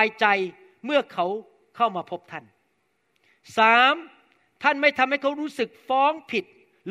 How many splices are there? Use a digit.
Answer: 0